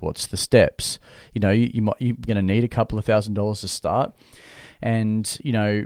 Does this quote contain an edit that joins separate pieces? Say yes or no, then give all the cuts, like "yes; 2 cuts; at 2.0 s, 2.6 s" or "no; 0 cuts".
yes; 2 cuts; at 1.2 s, 2.3 s